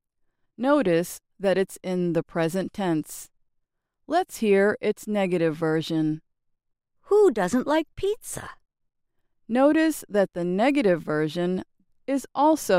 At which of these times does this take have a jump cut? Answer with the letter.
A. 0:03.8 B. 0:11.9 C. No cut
B